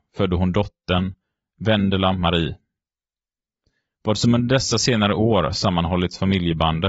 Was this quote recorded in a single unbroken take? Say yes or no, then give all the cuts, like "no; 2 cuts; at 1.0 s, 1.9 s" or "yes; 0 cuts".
yes; 0 cuts